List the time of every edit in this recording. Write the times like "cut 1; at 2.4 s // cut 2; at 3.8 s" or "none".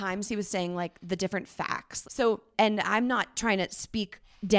cut 1; at 2.0 s